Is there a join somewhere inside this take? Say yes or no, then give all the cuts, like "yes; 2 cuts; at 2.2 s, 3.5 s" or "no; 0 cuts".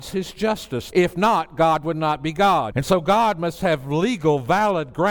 yes; 2 cuts; at 0.9 s, 2.7 s